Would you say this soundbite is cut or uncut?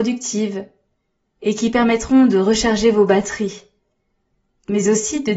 uncut